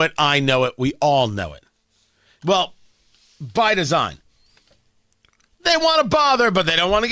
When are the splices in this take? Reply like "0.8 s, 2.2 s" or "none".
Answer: 2.4 s